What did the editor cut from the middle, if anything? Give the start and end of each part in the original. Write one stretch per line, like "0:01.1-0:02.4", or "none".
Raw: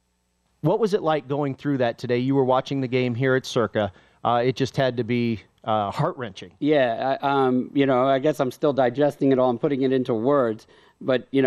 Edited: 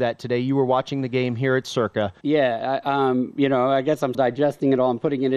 0:04.0-0:06.6
0:08.5-0:08.7